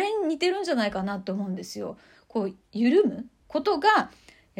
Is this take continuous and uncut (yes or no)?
no